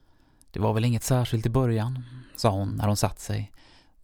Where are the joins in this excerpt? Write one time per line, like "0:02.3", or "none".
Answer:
none